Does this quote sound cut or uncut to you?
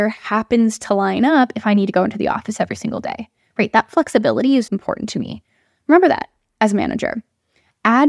cut